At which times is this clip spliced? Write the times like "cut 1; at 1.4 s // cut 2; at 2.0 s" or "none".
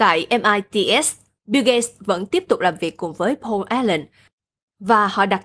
none